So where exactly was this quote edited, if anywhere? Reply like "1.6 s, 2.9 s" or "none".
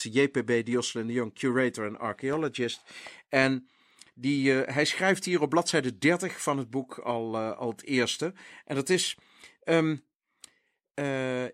none